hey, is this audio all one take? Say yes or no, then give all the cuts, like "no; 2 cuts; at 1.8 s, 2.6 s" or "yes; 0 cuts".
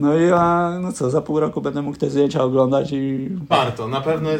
no; 1 cut; at 3.5 s